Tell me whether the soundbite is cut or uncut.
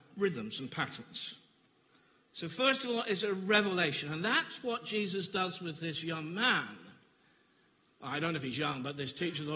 uncut